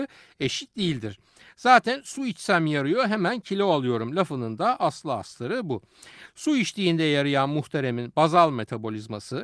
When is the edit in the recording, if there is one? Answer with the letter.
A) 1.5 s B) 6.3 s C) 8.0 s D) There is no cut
D